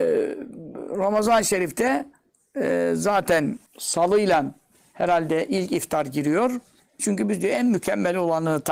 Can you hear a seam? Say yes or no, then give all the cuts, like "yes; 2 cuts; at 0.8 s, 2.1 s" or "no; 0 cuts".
yes; 2 cuts; at 3.7 s, 7.0 s